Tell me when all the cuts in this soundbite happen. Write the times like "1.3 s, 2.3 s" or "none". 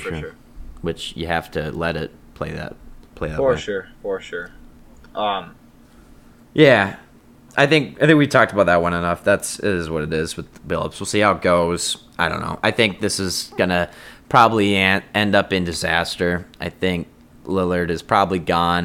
7.5 s